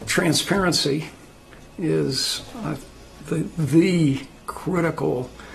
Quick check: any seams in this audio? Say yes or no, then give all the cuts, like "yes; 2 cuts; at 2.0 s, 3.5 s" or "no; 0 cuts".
no; 0 cuts